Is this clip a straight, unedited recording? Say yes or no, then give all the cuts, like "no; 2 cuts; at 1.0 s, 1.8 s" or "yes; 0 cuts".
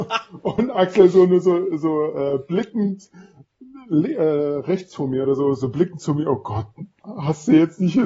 yes; 0 cuts